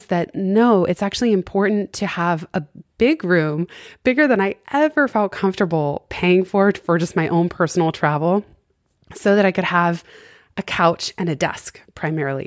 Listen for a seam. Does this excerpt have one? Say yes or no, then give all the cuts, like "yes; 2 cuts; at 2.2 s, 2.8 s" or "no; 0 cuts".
no; 0 cuts